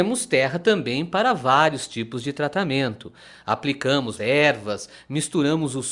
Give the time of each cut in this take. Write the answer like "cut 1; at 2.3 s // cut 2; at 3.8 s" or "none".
cut 1; at 4.2 s